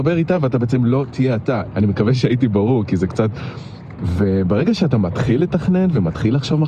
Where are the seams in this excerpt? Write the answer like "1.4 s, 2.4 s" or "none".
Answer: 1.7 s, 4.0 s